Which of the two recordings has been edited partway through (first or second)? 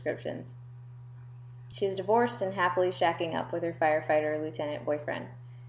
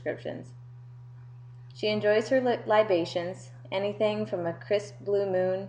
second